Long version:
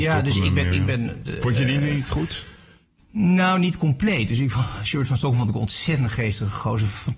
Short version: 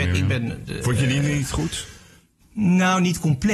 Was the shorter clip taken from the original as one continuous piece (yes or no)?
yes